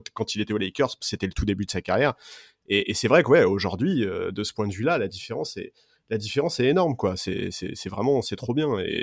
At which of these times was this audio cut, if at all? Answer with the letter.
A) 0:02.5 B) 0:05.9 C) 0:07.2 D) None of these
D